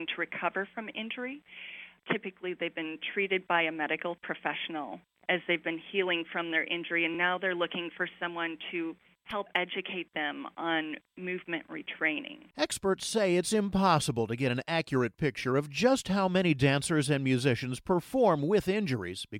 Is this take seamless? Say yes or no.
yes